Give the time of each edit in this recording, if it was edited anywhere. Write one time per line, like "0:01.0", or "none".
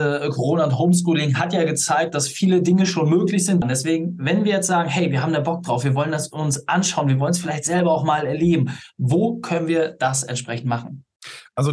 0:03.6